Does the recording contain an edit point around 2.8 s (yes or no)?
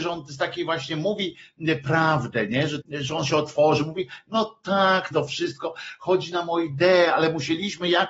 yes